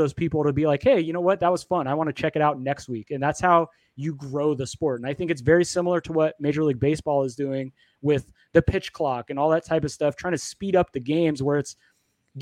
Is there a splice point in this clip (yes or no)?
no